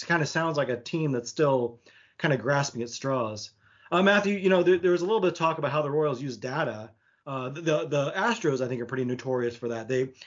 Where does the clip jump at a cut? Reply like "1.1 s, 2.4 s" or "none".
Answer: 7.2 s